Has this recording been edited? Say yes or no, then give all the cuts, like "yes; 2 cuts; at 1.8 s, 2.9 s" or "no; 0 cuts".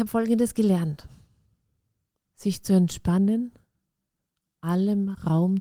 yes; 1 cut; at 2.2 s